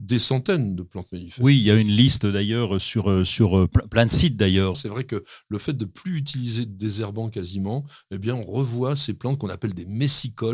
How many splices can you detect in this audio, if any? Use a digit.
1